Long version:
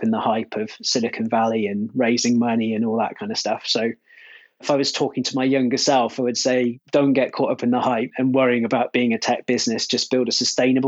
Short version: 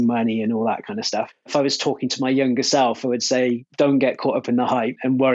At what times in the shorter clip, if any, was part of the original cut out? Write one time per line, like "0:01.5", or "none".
0:01.3